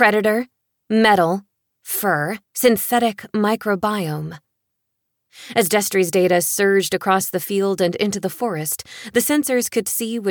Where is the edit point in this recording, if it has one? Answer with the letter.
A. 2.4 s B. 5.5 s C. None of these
A